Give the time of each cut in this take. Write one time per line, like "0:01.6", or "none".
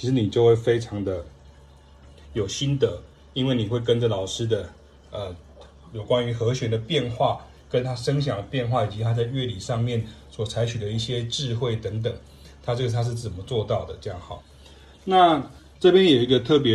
none